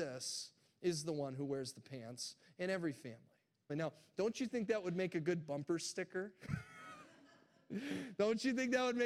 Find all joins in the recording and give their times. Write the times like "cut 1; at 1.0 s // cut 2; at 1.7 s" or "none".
cut 1; at 3.7 s